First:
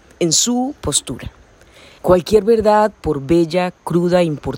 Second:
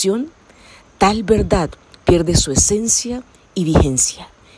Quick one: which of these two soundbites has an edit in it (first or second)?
first